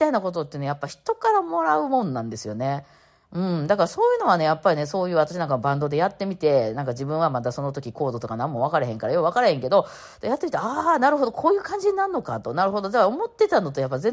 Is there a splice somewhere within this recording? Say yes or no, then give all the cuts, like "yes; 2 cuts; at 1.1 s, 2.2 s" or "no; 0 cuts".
no; 0 cuts